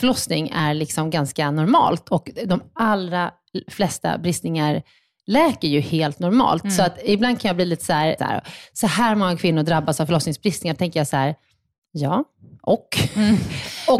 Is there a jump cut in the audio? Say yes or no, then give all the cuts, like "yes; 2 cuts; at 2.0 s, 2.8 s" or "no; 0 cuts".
yes; 1 cut; at 8.2 s